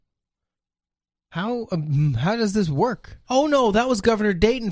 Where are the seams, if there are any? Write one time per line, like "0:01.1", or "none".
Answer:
0:03.2